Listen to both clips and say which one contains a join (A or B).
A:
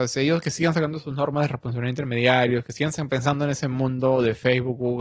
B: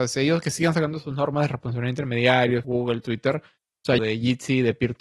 B